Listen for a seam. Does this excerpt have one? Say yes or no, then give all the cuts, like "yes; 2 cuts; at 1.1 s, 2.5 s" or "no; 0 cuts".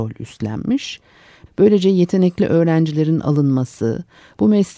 yes; 1 cut; at 1.5 s